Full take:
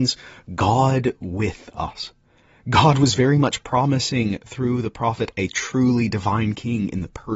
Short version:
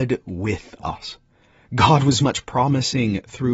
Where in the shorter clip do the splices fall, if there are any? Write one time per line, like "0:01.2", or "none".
0:02.2

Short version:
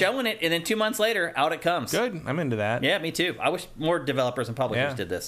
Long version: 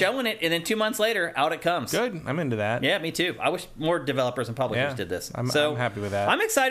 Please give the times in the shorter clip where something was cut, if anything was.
none

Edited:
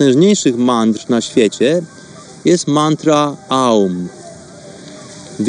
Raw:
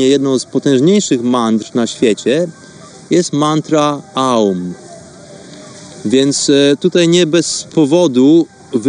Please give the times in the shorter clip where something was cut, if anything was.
none

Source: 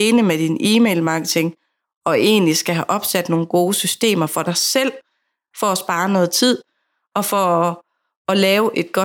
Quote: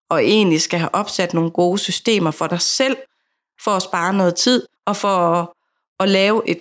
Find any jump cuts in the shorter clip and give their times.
0:04.8

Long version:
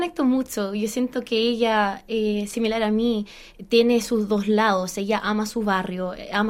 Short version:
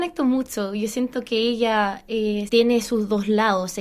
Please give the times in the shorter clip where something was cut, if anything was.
0:02.5

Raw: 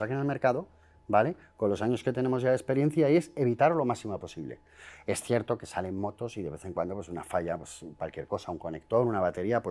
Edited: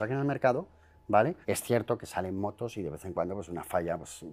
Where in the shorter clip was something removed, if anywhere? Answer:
0:01.4

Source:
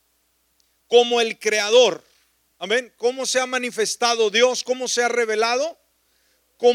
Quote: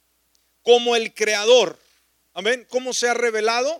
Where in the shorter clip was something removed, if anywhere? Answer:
0:02.7

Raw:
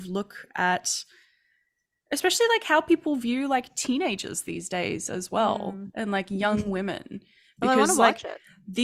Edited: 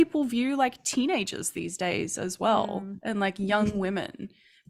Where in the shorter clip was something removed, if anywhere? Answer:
none

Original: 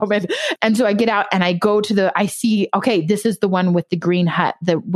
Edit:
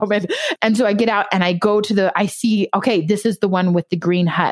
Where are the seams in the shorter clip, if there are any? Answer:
none

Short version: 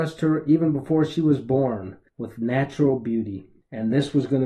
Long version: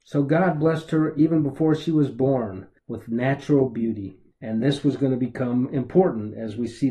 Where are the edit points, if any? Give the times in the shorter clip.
none

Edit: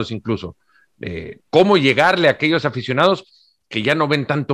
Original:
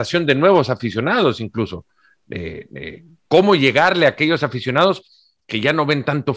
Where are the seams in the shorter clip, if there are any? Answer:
0:01.4

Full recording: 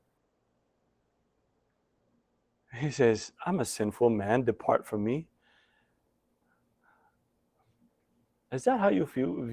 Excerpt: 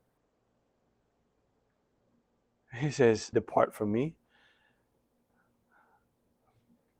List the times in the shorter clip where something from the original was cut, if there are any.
0:03.3

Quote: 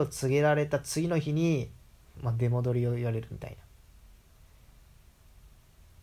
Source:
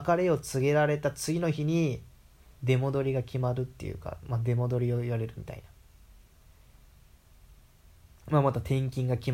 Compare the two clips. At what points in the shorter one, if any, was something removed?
0:02.2

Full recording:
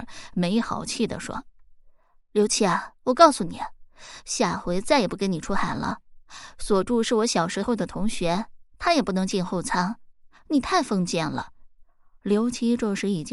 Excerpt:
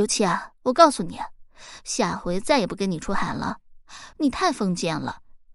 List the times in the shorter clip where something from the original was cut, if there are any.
0:04.1

